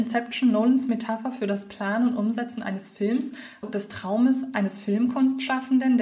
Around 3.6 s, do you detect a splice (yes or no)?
yes